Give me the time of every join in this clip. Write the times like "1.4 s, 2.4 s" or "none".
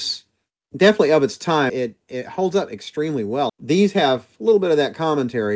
1.7 s, 3.5 s